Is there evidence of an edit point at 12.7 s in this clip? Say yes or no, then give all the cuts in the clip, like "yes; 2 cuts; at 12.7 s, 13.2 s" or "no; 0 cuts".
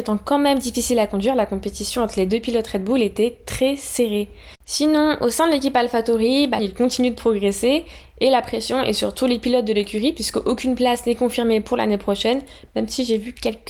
no; 2 cuts; at 4.5 s, 6.6 s